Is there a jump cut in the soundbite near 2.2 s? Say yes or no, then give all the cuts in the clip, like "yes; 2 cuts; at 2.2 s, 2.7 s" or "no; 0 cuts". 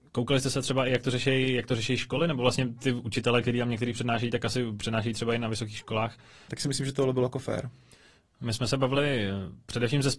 no; 1 cut; at 6.5 s